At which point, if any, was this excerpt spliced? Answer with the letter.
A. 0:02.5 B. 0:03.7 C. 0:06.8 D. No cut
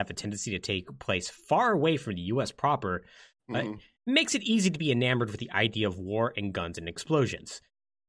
D